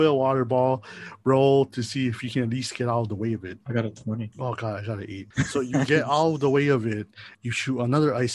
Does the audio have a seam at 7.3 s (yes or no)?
yes